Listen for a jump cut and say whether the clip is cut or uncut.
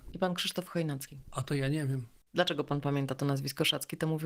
uncut